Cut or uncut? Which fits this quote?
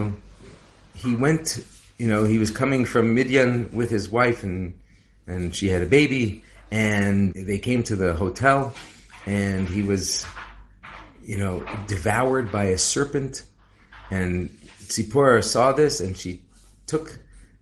cut